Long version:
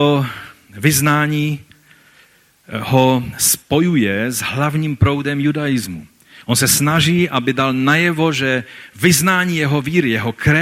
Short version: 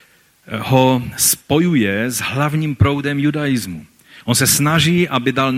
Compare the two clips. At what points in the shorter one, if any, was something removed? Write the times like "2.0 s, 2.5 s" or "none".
none